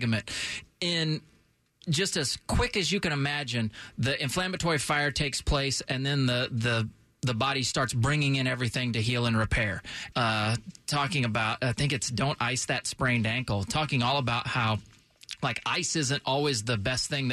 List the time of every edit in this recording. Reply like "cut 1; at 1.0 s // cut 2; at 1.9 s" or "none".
cut 1; at 10.1 s